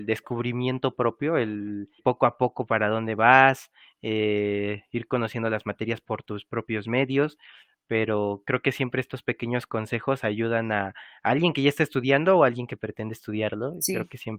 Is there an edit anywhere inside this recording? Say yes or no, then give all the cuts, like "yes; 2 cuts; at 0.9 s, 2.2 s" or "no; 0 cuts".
yes; 1 cut; at 2.0 s